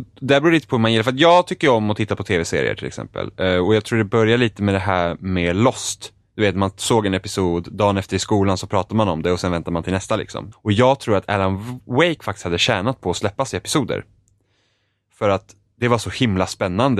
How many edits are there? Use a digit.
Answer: 1